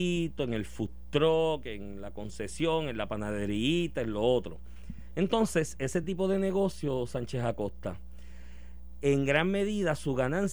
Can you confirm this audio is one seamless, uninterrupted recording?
yes; 0 cuts

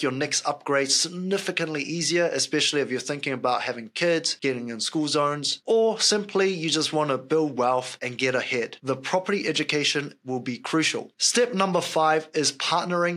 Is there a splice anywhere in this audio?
no; 0 cuts

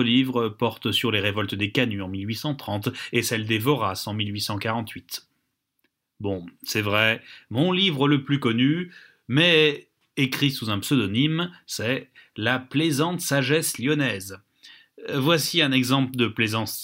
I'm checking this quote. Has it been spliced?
no; 0 cuts

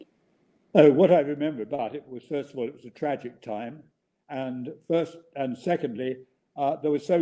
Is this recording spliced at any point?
no; 0 cuts

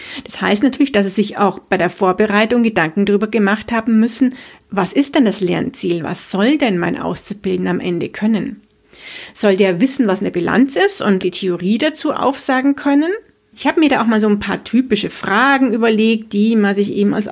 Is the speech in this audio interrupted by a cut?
yes; 2 cuts; at 11.2 s, 13.5 s

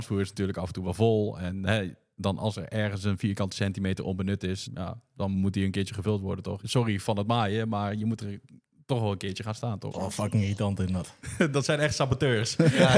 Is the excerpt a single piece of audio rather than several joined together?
no; 2 cuts; at 4.7 s, 9.9 s

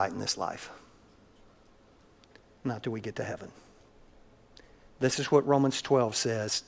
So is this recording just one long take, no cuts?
yes; 0 cuts

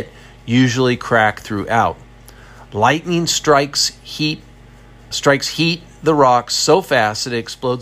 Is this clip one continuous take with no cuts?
no; 1 cut; at 5.1 s

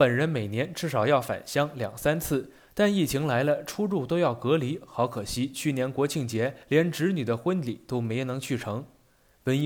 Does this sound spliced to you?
no; 0 cuts

